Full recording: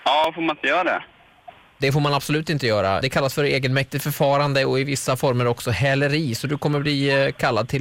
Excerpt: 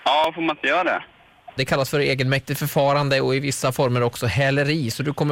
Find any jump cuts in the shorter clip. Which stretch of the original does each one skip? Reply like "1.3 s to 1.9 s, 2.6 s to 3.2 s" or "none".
1.6 s to 3.0 s